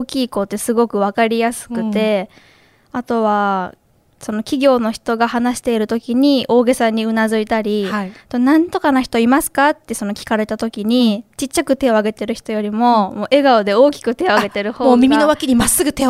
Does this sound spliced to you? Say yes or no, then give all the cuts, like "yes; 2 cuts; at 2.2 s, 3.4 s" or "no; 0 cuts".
no; 0 cuts